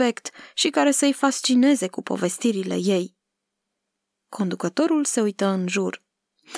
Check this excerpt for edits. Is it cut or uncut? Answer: uncut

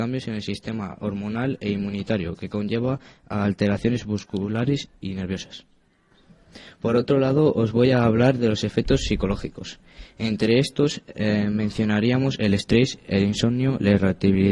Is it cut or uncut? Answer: uncut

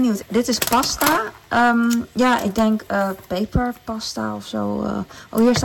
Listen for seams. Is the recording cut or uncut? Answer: uncut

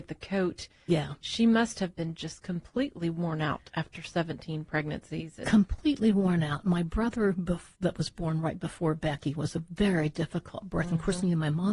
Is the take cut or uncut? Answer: uncut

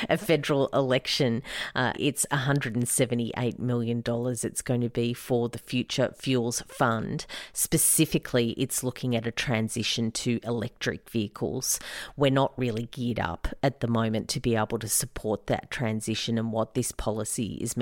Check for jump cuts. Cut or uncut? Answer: cut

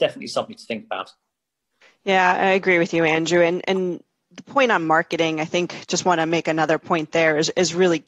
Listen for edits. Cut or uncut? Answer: uncut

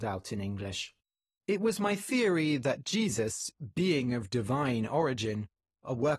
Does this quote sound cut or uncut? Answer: uncut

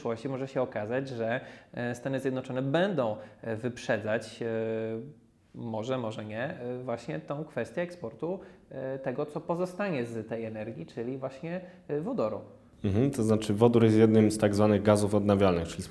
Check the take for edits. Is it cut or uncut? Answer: uncut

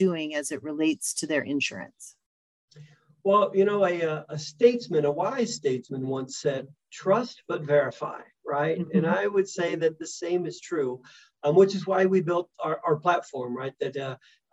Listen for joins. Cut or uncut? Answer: uncut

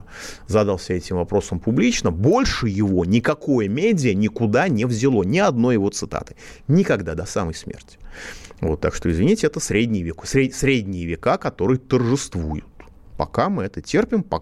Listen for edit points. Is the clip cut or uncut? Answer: uncut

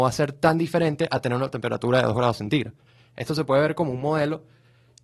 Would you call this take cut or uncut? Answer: uncut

